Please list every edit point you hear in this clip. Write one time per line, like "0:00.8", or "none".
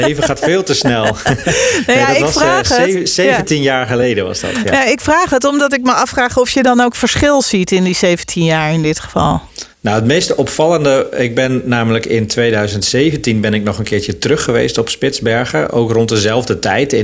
0:09.7

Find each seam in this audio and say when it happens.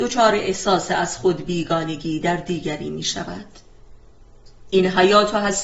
0:04.7

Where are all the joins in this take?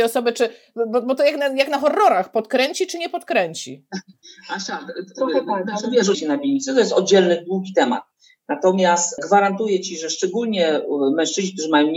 0:06.1

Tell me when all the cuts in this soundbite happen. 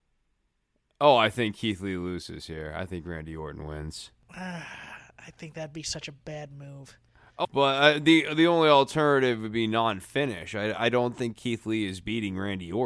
0:07.4

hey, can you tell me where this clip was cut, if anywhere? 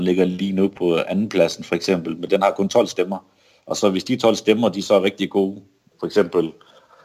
0:05.9

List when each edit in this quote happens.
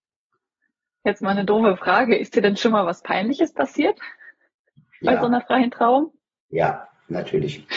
none

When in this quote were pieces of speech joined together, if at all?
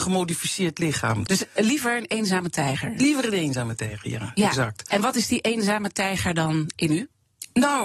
0:01.3

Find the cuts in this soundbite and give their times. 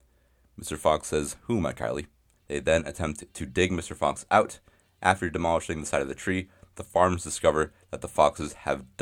0:02.4

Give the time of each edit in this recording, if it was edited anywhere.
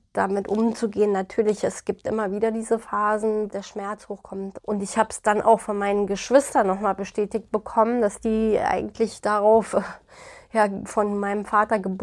0:03.5
0:04.6

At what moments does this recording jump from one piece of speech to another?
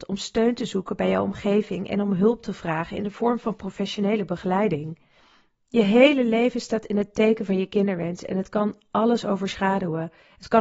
none

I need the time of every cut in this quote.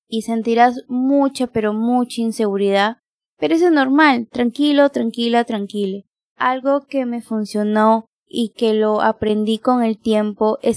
none

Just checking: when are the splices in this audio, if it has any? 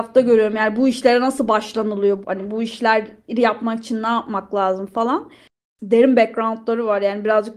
0:02.2
0:05.7

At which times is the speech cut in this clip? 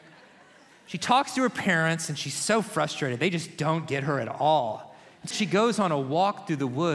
0:05.3

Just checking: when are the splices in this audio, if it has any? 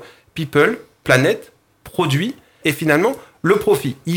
0:02.6

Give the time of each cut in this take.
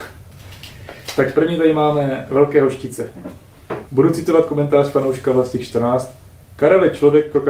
0:03.9

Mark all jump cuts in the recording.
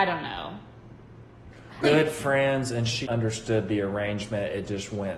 0:01.8
0:03.0

